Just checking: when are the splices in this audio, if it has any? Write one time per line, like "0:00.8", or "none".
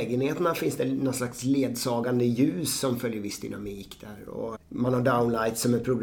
0:04.5